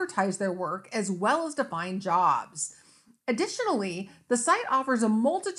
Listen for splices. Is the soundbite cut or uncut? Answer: uncut